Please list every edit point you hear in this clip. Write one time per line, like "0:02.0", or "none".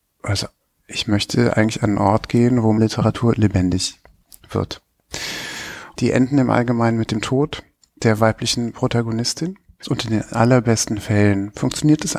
0:05.9
0:09.8